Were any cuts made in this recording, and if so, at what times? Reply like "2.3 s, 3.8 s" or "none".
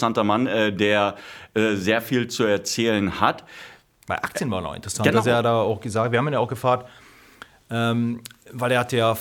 none